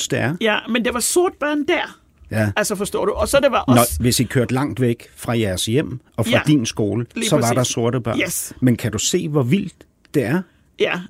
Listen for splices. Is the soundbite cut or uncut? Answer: uncut